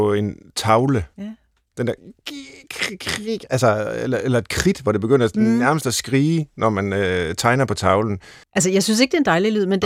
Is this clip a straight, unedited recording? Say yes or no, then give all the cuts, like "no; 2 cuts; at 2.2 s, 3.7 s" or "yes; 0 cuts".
no; 1 cut; at 8.4 s